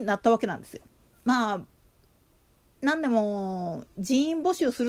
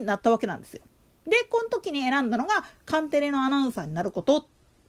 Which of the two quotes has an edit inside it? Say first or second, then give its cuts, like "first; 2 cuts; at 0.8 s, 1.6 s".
first; 1 cut; at 1.1 s